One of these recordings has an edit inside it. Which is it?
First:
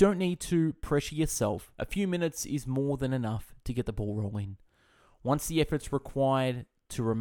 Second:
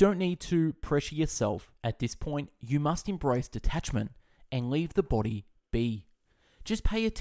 second; 1 cut; at 1.8 s

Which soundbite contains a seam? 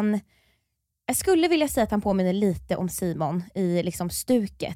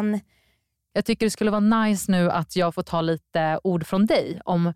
second; 1 cut; at 0.9 s

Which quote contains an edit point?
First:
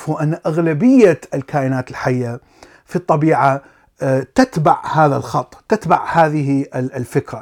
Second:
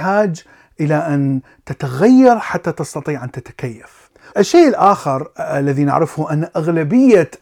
second; 1 cut; at 4.3 s

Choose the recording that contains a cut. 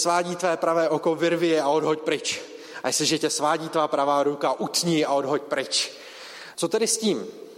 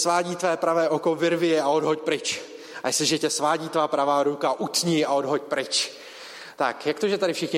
first; 1 cut; at 6.5 s

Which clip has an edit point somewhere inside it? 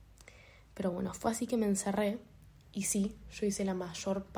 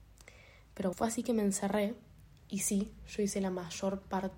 second; 1 cut; at 0.9 s

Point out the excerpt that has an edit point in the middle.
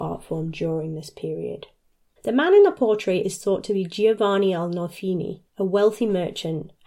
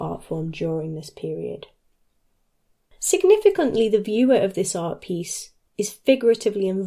first; 2 cuts; at 2.2 s, 5.5 s

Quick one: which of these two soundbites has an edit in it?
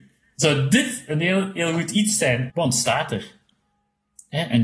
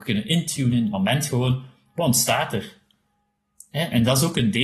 first; 1 cut; at 2.5 s

